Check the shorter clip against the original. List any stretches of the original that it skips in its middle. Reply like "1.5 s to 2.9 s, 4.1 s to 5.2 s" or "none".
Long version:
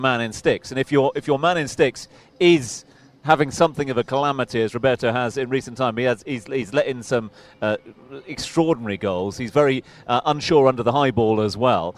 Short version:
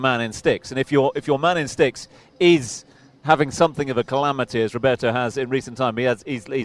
none